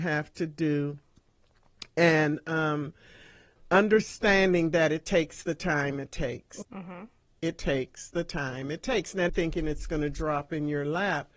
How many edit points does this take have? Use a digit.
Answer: 2